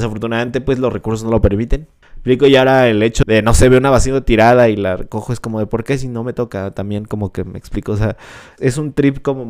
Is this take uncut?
no; 3 cuts; at 2.0 s, 3.2 s, 8.6 s

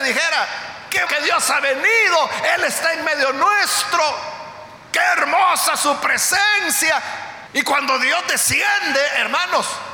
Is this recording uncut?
no; 2 cuts; at 1.1 s, 7.5 s

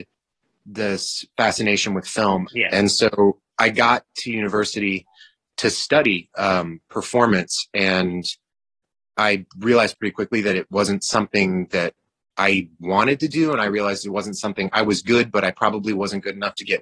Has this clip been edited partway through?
yes; 1 cut; at 2.5 s

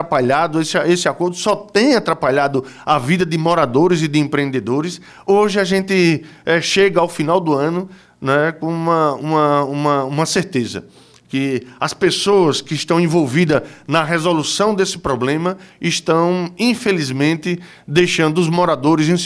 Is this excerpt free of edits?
yes; 0 cuts

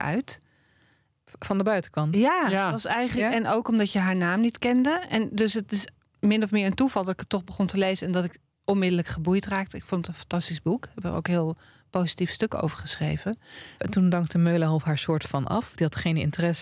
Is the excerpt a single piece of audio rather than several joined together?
no; 1 cut; at 13.8 s

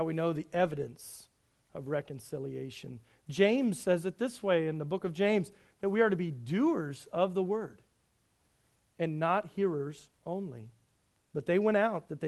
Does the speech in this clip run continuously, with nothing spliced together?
no; 1 cut; at 11.2 s

